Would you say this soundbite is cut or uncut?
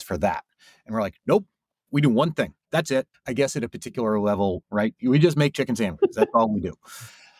cut